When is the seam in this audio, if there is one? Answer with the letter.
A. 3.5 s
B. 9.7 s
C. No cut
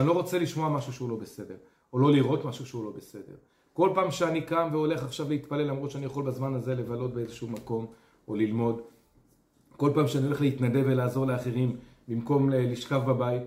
C